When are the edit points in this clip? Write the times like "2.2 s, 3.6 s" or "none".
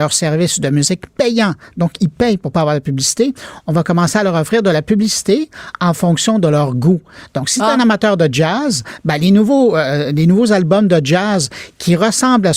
none